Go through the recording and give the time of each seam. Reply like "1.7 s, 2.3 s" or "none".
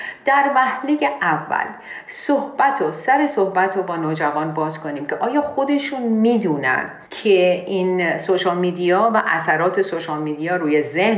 7.1 s